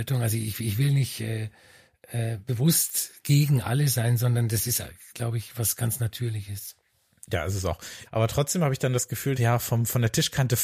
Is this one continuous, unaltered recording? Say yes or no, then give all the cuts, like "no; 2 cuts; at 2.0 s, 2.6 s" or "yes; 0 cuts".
no; 2 cuts; at 8.1 s, 9.4 s